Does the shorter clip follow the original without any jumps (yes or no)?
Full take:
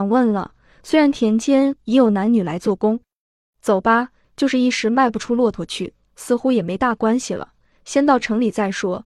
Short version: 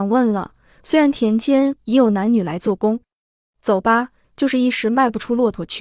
yes